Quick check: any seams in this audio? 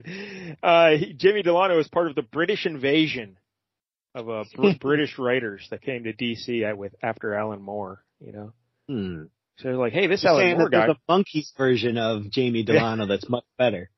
no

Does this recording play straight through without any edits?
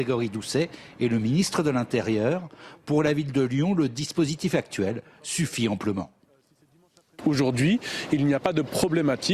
yes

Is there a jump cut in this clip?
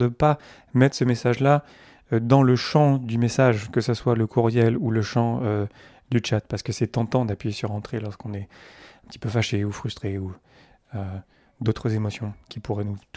no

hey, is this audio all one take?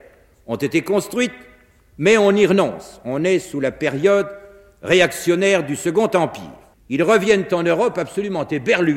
no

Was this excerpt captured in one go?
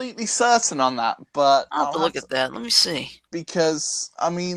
no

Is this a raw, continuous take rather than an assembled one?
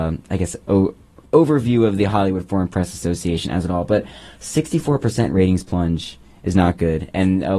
yes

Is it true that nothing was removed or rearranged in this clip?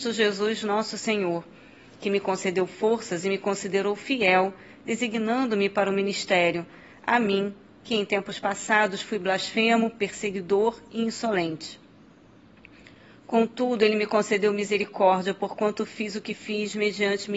yes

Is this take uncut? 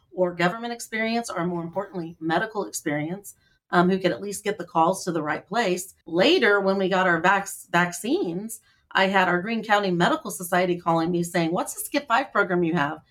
no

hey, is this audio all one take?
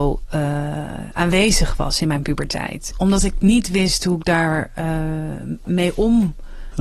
no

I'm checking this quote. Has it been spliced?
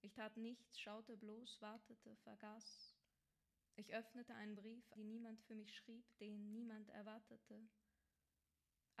yes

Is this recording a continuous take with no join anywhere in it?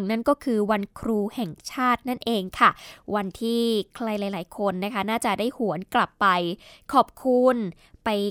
yes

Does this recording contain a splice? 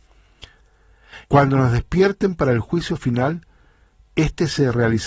yes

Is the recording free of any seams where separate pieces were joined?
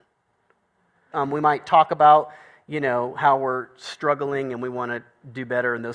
no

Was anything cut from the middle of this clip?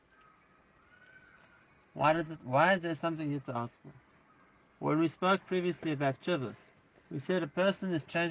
no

